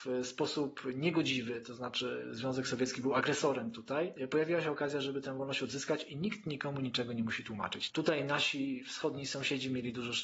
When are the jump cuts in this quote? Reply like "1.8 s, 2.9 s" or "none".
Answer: 7.9 s